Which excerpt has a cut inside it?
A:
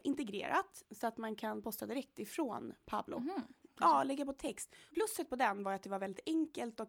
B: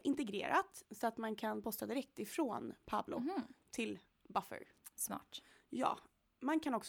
A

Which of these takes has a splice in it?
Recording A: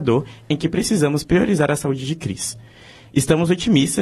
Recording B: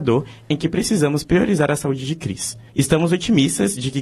B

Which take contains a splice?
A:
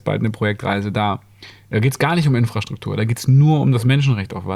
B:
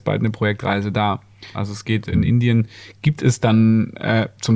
B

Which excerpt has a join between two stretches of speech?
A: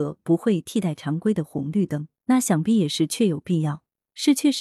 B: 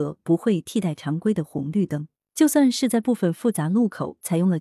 A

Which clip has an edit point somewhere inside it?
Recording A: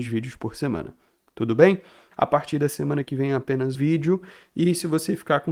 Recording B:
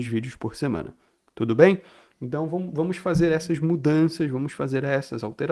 A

